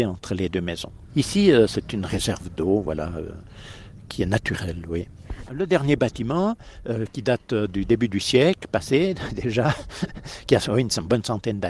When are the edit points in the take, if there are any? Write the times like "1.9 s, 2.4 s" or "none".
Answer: 2.1 s, 5.5 s